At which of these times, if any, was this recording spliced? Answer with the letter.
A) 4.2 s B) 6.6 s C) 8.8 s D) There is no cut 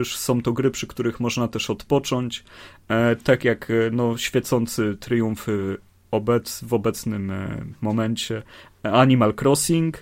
D